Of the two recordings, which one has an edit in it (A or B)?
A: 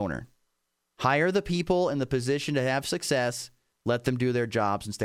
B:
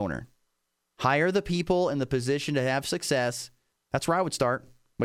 B